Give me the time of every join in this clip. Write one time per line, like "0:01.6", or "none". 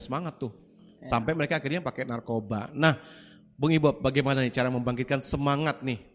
none